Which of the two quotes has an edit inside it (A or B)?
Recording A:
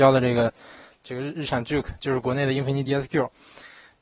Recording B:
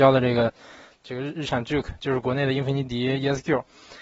A